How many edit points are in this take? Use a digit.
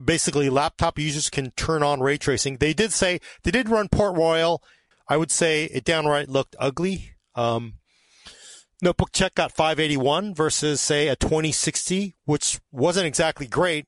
1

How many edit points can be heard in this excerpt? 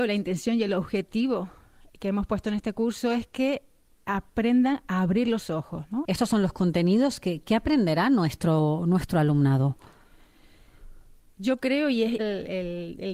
2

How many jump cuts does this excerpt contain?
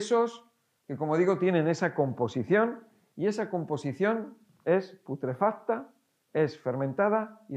0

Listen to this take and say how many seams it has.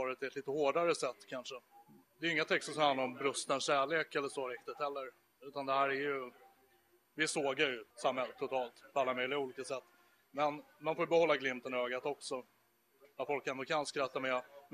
2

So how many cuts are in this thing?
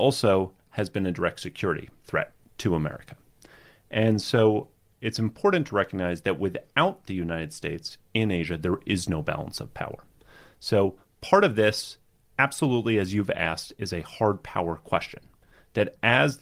0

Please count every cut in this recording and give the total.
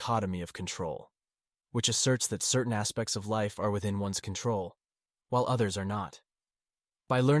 0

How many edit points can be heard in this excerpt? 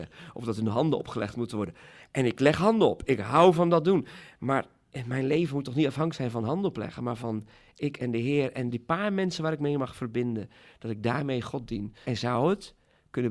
2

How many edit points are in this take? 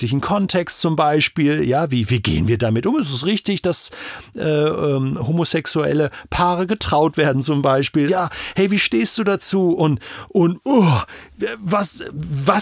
1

